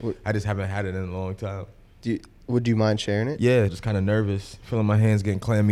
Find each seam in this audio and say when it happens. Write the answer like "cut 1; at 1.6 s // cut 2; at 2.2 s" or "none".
cut 1; at 3.7 s